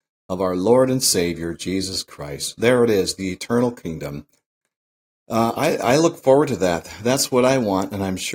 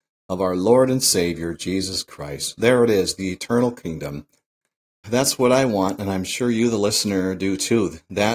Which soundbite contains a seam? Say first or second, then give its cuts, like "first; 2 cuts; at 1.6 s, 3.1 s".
second; 1 cut; at 5.0 s